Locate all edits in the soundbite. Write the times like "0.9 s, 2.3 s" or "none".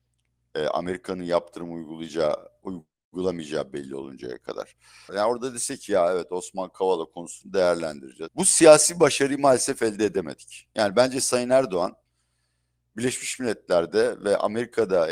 5.1 s, 8.3 s